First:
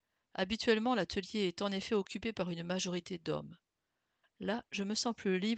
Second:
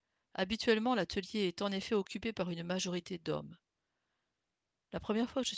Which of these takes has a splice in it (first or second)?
first